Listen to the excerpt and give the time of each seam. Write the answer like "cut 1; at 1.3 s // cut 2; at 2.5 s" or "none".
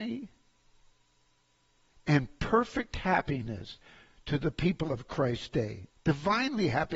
cut 1; at 5.9 s